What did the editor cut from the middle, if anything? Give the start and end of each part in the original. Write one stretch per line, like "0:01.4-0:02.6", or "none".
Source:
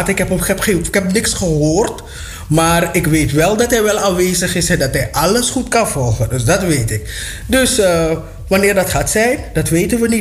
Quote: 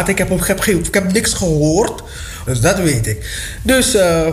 0:02.5-0:06.3